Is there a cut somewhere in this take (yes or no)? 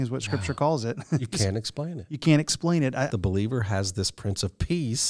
yes